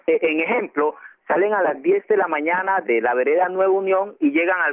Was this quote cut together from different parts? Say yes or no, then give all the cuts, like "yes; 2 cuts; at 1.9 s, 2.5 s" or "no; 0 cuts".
yes; 1 cut; at 2.8 s